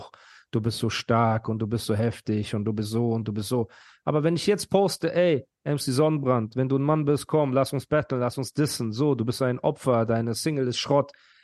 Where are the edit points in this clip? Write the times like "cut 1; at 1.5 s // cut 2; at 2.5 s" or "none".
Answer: none